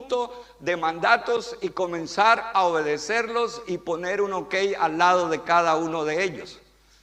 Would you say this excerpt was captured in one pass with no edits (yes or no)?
yes